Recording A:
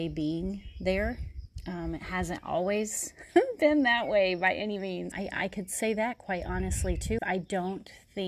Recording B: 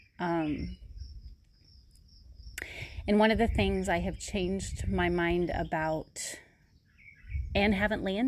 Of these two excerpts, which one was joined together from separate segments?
A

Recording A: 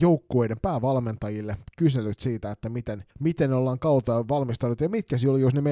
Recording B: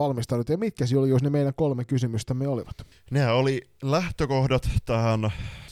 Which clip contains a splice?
A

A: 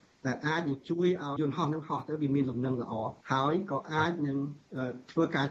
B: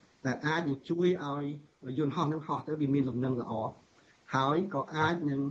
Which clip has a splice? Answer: A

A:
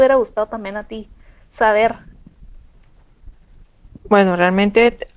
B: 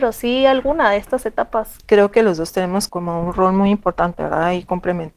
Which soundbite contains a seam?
B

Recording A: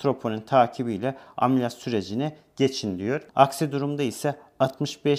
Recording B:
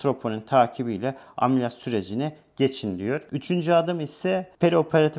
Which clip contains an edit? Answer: A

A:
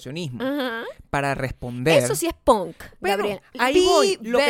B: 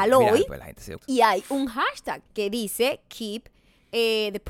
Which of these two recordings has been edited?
B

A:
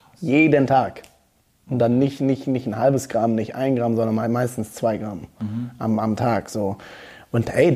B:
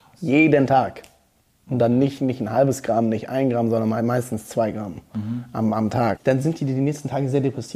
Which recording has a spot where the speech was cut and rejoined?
B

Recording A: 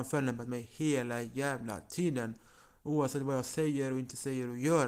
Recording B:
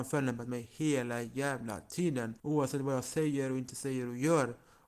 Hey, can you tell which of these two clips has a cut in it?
B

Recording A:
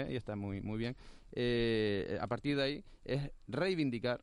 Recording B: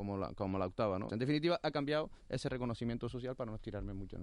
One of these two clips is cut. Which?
B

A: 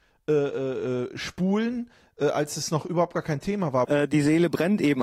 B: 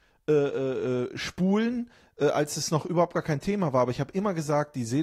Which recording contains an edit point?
A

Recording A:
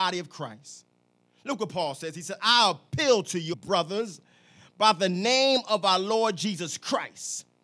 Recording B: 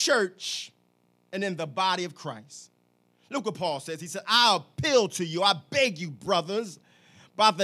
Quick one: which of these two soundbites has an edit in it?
A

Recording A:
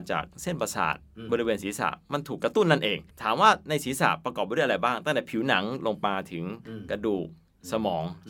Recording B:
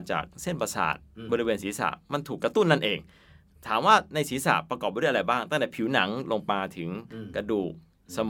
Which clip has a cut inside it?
A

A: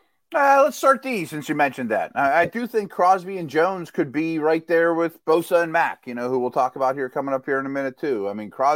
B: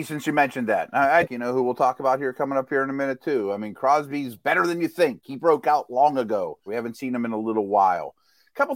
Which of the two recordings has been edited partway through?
B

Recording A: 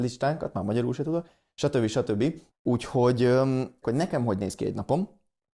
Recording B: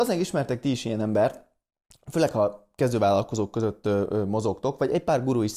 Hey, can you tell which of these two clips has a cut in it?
A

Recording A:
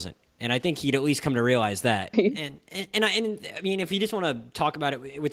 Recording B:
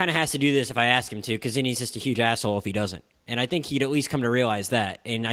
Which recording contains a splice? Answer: A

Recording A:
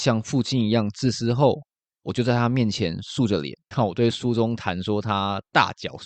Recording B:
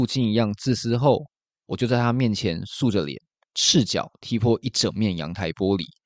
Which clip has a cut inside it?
A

